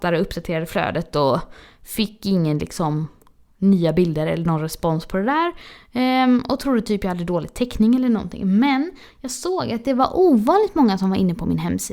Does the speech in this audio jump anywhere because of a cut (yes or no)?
no